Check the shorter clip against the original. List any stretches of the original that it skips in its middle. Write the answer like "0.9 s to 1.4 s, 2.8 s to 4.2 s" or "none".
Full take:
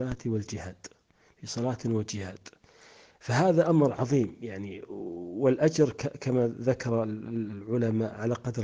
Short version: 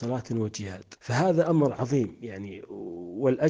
2.5 s to 3.2 s